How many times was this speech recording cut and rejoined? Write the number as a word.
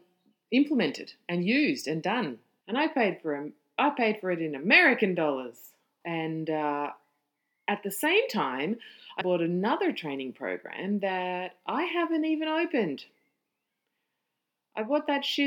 three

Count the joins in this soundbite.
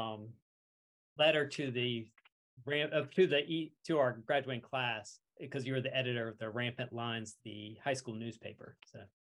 two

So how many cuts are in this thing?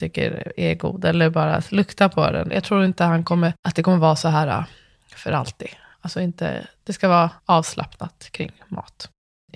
three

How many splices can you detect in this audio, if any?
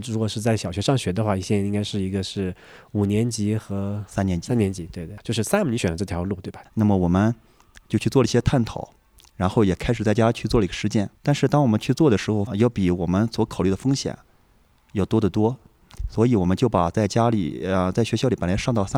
three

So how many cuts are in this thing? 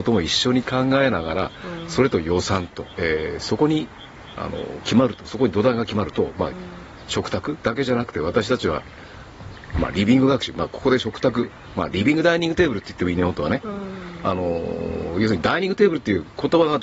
two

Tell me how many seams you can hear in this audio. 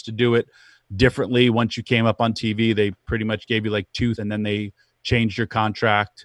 one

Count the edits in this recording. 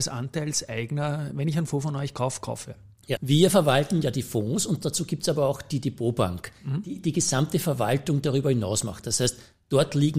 one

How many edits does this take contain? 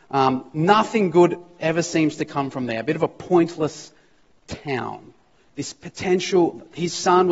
one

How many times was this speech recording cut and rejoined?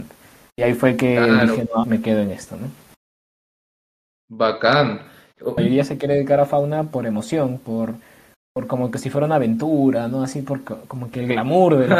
two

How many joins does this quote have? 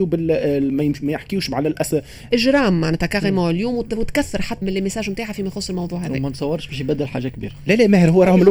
two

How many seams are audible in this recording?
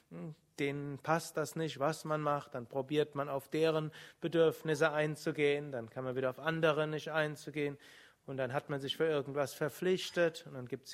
zero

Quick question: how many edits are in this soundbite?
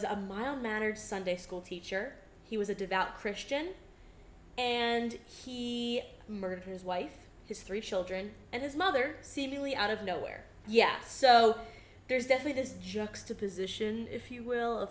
one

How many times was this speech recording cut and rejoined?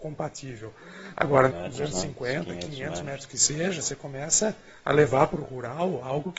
one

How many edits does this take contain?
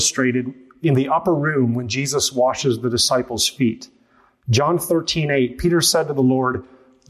zero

